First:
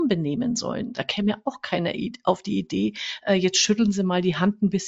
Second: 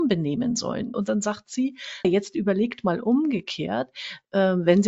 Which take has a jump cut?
second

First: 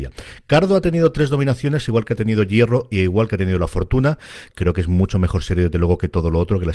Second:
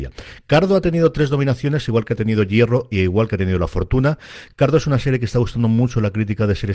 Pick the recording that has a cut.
first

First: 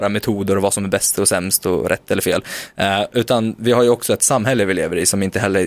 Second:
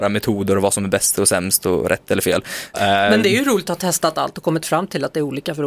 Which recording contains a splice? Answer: second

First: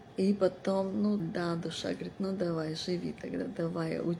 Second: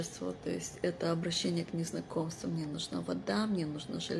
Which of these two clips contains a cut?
first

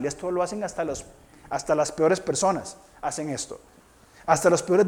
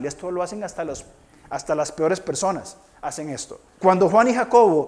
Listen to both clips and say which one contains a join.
second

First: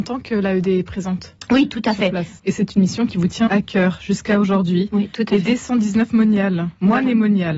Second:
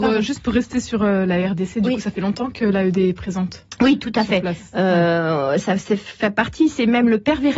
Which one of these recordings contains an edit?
first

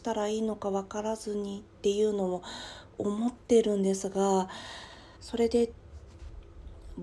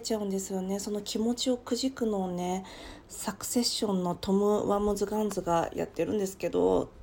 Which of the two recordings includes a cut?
first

